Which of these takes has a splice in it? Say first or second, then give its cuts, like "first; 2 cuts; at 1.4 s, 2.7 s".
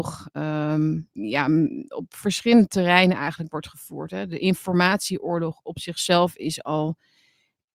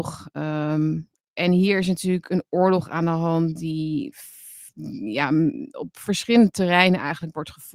first; 1 cut; at 1.2 s